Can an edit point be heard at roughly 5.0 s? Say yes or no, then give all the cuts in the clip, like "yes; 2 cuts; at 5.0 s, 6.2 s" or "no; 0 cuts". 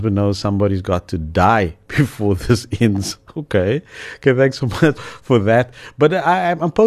yes; 1 cut; at 5.0 s